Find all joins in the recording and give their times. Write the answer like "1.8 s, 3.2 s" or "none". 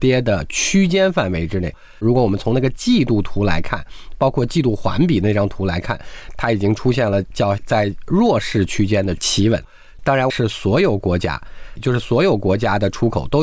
10.3 s, 11.8 s